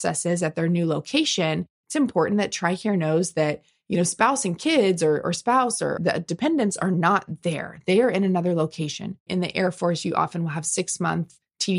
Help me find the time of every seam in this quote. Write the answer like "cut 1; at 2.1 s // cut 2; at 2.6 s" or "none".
cut 1; at 6.0 s // cut 2; at 9.3 s

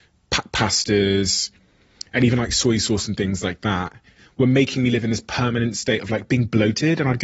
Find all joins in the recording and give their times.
none

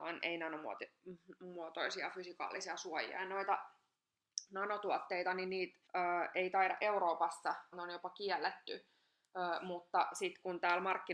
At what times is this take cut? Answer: cut 1; at 5.9 s // cut 2; at 7.7 s

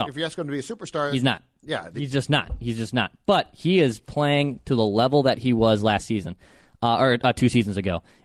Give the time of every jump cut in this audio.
none

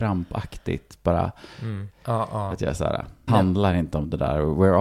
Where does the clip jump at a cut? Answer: cut 1; at 1.9 s // cut 2; at 3.3 s

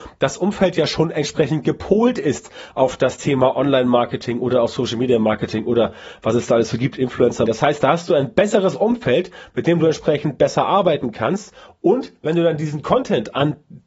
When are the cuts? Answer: cut 1; at 7.5 s

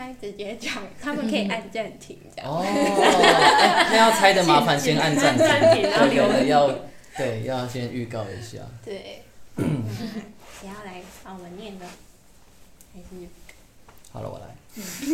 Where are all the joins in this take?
none

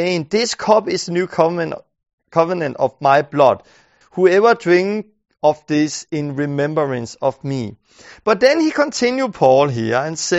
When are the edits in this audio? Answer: cut 1; at 4.0 s

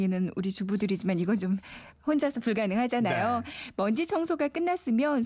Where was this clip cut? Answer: none

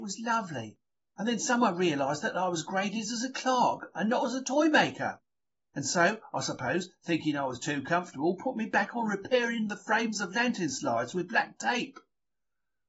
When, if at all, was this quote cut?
none

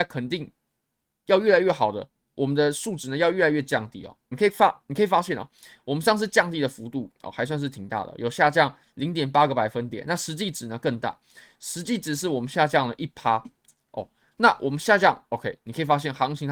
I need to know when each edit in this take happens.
cut 1; at 4.3 s

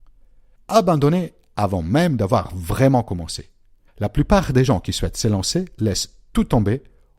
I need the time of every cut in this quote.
none

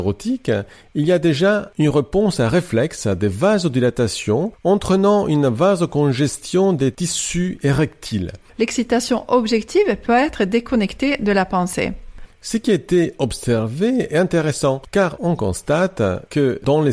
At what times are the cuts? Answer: cut 1; at 8.5 s // cut 2; at 12.3 s

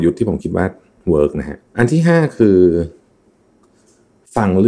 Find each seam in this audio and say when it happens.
cut 1; at 1.7 s

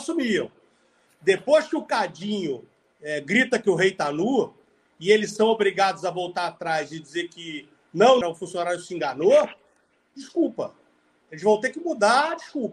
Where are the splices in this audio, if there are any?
cut 1; at 8.2 s // cut 2; at 11.2 s

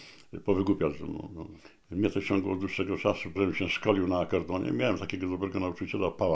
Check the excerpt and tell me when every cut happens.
cut 1; at 3.4 s

